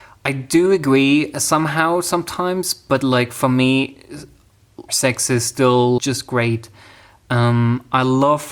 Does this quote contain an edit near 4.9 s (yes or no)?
yes